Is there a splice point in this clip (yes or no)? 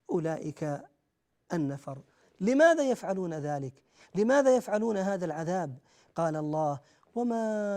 yes